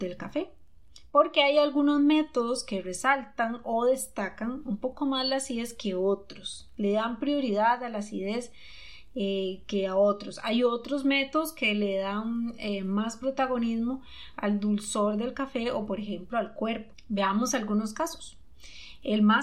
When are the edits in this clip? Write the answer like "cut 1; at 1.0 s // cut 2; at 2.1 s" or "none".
none